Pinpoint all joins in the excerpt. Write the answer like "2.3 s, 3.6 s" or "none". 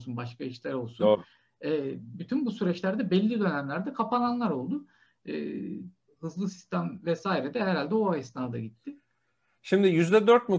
6.1 s